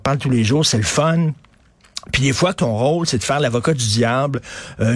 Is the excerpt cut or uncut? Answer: cut